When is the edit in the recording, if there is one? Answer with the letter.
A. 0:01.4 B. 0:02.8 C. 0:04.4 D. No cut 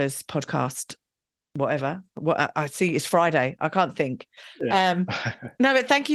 C